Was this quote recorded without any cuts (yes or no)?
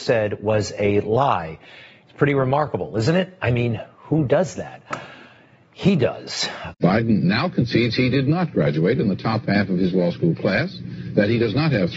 no